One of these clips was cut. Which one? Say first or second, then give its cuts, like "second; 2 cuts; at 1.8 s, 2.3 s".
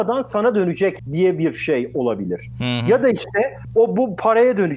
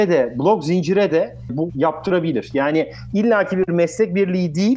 second; 1 cut; at 1.7 s